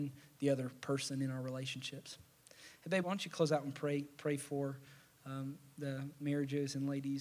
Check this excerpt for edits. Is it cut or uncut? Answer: cut